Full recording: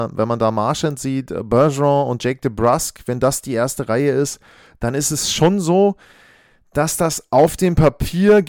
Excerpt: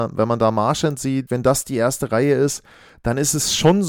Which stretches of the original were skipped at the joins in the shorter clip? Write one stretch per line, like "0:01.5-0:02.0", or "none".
0:01.3-0:03.0